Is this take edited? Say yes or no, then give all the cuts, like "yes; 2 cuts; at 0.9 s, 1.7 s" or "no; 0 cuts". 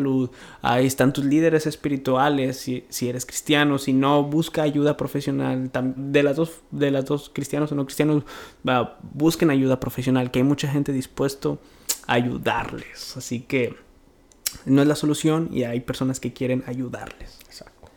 yes; 1 cut; at 6.0 s